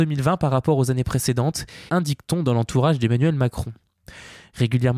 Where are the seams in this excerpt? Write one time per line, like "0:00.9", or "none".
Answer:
0:01.9